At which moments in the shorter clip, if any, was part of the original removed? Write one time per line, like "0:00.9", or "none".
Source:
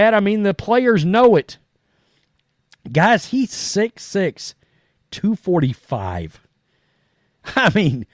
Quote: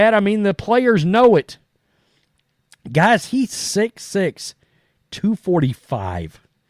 none